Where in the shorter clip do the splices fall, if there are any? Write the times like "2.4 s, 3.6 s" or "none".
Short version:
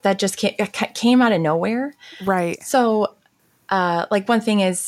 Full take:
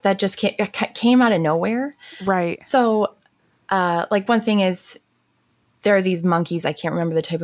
none